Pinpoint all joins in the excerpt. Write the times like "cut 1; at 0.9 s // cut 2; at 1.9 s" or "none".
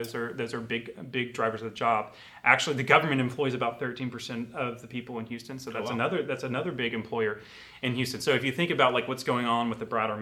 none